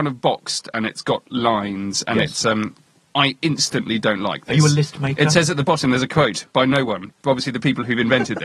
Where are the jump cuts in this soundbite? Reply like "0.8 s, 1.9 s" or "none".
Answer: none